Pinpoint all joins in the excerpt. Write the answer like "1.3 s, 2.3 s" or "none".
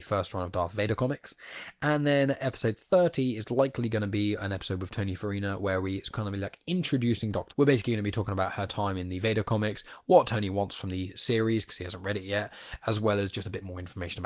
7.5 s